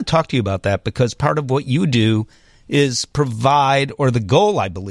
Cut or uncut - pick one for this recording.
uncut